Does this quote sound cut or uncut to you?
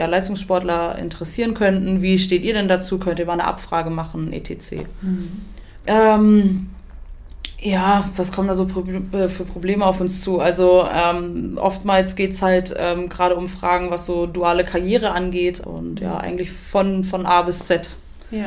cut